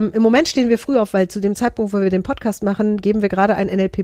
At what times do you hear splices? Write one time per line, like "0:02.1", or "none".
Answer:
none